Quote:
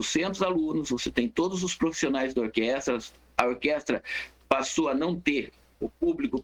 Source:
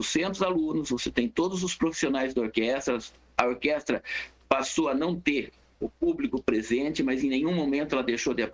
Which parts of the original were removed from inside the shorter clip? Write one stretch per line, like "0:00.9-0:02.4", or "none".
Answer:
none